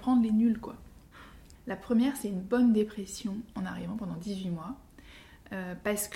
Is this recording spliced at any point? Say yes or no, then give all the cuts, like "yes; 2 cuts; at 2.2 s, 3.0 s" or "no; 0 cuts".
yes; 1 cut; at 1.6 s